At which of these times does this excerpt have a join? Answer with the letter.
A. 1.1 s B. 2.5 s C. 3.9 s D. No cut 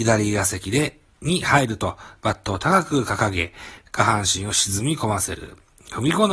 C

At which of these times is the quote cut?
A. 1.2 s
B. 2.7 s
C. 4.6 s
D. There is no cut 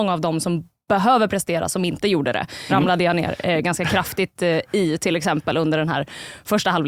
B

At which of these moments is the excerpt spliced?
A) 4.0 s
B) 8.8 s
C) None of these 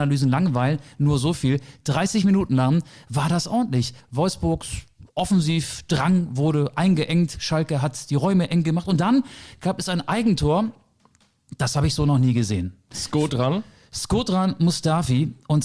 A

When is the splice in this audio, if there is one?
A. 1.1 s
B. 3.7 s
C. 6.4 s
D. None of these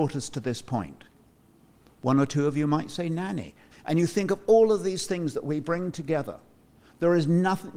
B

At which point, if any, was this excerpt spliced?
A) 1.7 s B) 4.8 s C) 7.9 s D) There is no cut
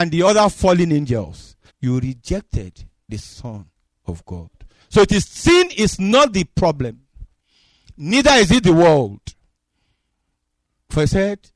A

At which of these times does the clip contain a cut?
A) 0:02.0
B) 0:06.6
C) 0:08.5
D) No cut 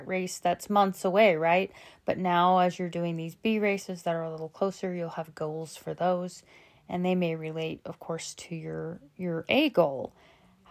D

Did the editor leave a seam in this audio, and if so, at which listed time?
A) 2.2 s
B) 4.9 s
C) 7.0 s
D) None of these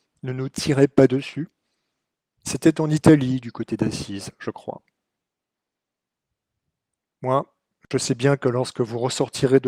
D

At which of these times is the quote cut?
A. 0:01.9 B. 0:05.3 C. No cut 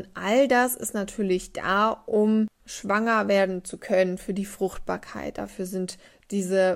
C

